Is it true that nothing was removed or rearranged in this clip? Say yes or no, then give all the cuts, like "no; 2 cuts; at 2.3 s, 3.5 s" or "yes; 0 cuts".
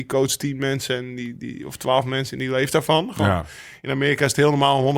yes; 0 cuts